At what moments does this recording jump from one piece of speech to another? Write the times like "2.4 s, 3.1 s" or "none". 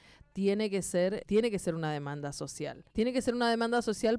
1.2 s, 2.9 s